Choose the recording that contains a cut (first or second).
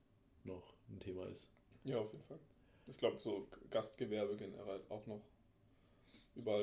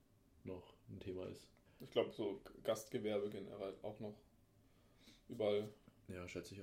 second